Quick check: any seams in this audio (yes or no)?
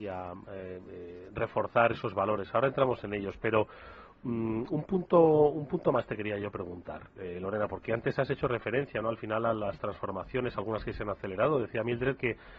no